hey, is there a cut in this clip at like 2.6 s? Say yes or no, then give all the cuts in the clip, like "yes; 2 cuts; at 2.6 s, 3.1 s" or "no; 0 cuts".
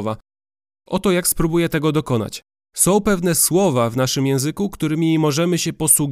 yes; 1 cut; at 2.6 s